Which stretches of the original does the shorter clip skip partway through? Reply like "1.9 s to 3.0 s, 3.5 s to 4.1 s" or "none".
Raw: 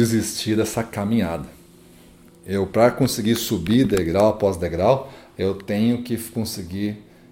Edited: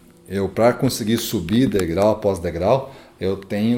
none